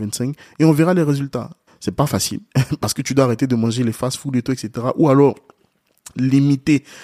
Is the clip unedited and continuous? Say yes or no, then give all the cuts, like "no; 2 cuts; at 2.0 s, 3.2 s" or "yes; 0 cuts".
no; 1 cut; at 1.7 s